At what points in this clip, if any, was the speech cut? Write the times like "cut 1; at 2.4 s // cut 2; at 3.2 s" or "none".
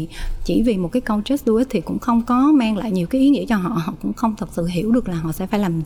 none